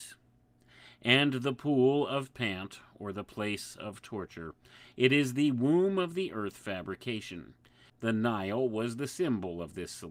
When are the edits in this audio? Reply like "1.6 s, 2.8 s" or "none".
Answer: 7.9 s